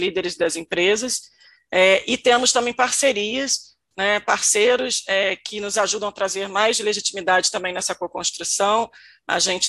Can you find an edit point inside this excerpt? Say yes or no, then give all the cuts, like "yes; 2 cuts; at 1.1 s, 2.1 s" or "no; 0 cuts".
no; 0 cuts